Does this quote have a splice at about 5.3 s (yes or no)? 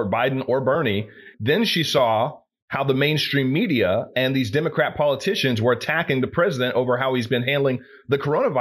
no